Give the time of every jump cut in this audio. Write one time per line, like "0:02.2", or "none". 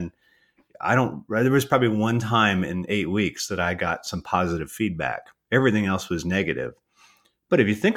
none